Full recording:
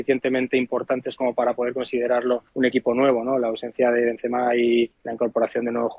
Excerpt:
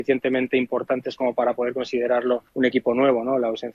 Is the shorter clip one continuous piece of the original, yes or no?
yes